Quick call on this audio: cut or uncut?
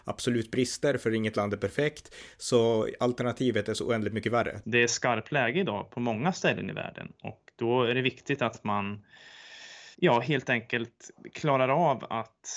cut